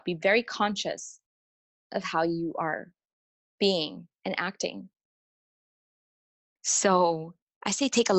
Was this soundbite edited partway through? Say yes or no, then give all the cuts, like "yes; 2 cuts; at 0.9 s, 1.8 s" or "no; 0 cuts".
yes; 1 cut; at 6.6 s